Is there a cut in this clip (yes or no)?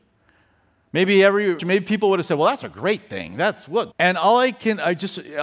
yes